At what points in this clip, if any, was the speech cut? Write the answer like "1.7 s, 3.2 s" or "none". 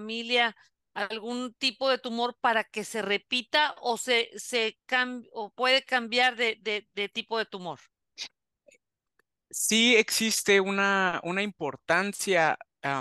none